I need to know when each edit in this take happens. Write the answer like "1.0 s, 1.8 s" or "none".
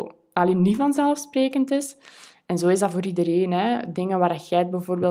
none